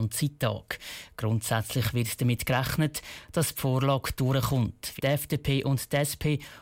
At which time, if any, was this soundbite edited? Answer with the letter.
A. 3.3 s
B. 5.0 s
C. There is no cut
B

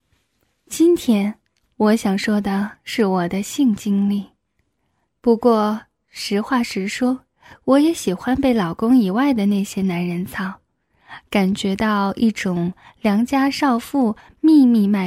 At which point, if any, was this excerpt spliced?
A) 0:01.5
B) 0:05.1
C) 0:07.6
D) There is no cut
B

